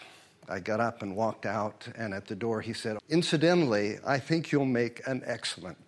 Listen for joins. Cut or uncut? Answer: cut